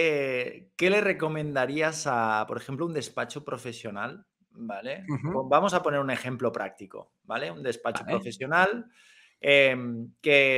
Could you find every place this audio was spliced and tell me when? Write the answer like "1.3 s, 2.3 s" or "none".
none